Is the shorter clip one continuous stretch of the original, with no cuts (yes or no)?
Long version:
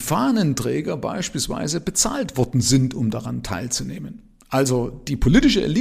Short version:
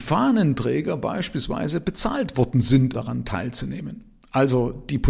no